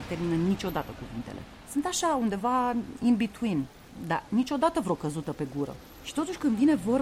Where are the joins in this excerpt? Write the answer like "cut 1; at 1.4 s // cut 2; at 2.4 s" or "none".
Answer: none